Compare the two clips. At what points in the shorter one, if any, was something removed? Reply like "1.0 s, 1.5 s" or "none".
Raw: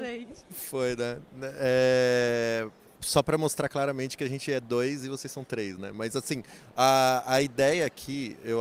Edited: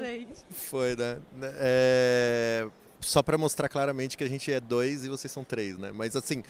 none